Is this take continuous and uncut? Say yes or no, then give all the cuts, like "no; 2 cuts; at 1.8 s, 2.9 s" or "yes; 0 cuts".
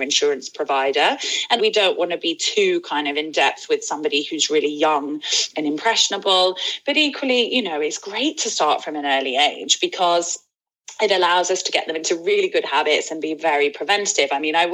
no; 1 cut; at 1.6 s